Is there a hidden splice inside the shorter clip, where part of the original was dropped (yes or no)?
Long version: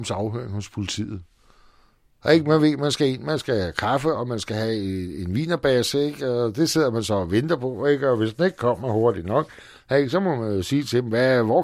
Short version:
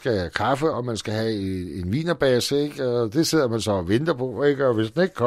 no